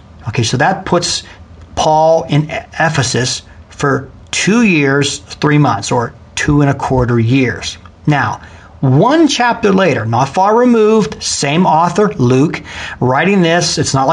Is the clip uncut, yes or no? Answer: yes